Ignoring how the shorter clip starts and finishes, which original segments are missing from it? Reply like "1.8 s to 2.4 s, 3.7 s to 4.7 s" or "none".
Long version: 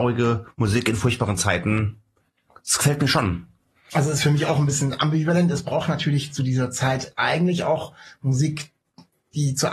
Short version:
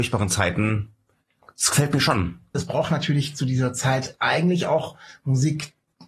3.6 s to 5.5 s